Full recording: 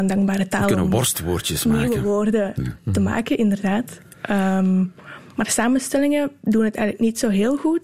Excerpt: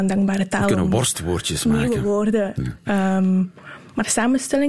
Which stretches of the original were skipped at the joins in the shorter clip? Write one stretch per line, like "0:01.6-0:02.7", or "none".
0:02.9-0:04.3